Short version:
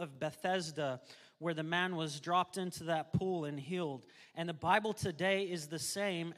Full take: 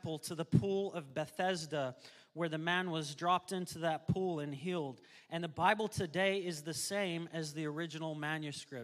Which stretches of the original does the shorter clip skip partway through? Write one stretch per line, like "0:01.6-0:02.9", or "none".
none